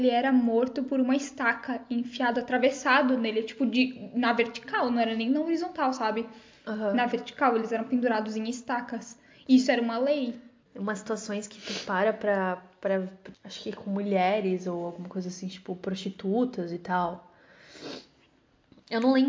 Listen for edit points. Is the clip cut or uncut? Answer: cut